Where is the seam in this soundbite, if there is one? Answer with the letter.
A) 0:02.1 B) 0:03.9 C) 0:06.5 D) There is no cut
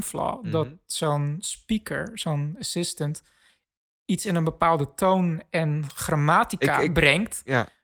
D